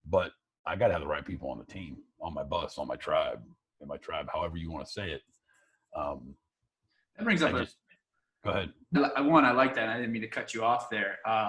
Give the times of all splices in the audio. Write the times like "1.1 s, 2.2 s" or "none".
8.9 s